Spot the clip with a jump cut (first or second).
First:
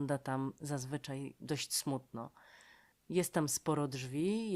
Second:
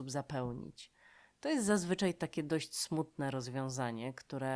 first